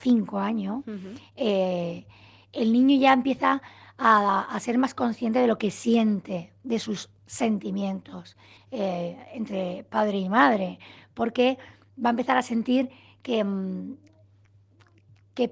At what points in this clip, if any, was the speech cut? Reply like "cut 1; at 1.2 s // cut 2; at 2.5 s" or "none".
cut 1; at 8.6 s